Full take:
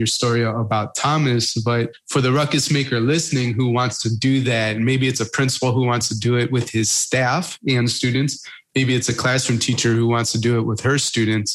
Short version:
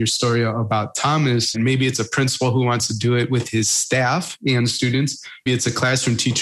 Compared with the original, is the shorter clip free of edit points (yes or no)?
no